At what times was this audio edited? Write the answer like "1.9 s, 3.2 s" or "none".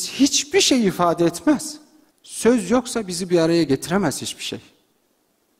2.1 s